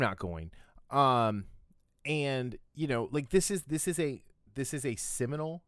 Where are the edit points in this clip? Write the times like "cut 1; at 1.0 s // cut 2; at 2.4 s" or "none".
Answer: none